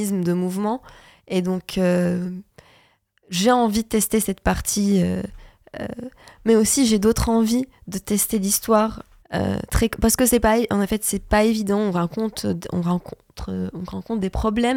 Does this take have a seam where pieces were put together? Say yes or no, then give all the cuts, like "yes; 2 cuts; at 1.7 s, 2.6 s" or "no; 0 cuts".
yes; 1 cut; at 9.2 s